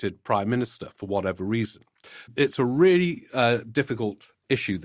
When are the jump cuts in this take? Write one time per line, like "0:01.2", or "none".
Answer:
0:02.3